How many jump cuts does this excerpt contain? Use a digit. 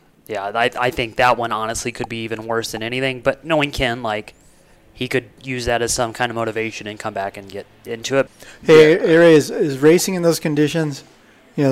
1